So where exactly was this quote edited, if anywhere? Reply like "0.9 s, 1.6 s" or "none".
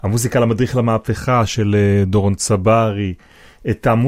none